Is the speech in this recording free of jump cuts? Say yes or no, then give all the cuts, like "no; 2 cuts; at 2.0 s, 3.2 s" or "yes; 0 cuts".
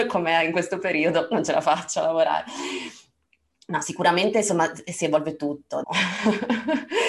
no; 1 cut; at 5.8 s